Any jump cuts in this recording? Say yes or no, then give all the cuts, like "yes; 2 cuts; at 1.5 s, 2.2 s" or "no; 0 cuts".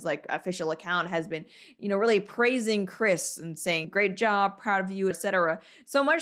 yes; 2 cuts; at 3.8 s, 5.1 s